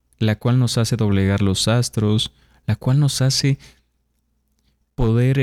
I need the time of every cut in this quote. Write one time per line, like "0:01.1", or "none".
none